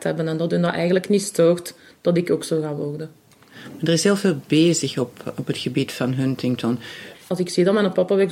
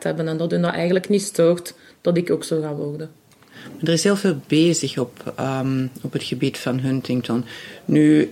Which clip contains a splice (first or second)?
first